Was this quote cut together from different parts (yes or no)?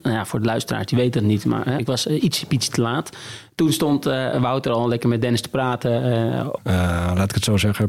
yes